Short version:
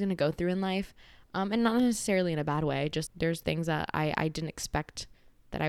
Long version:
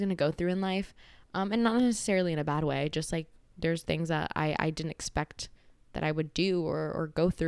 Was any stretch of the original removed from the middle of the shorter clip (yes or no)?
yes